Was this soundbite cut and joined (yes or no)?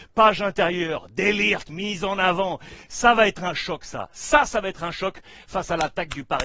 no